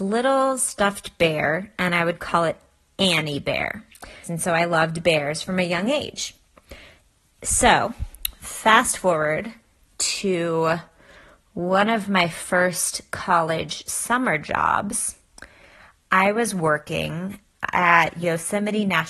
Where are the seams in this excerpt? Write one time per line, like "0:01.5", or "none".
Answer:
0:04.2